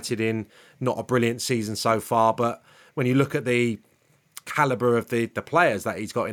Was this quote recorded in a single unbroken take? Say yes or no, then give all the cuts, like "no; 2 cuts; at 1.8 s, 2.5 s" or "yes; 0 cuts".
yes; 0 cuts